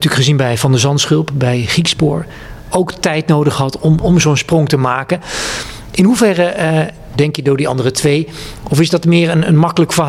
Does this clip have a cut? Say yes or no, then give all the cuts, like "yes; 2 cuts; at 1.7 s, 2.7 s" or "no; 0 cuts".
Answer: yes; 1 cut; at 7.1 s